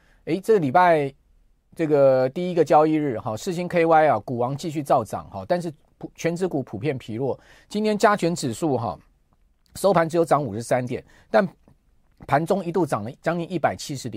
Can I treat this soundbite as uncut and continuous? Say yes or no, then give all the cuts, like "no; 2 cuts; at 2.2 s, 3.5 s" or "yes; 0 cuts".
yes; 0 cuts